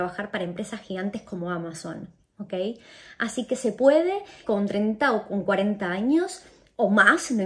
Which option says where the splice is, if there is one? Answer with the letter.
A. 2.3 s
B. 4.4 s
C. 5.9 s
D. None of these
B